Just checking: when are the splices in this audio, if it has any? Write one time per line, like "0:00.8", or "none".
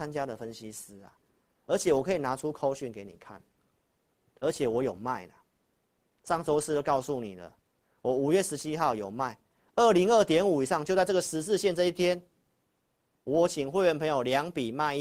none